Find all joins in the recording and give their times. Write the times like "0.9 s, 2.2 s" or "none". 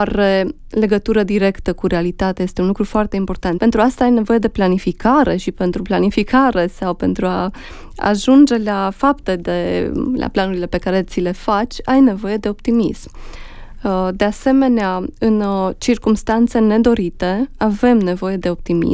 3.6 s